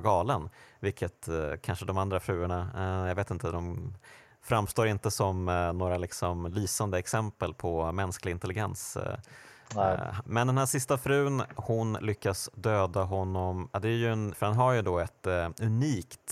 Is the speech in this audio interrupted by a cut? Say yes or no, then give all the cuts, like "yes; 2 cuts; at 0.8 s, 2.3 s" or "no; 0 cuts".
yes; 2 cuts; at 10.3 s, 14.3 s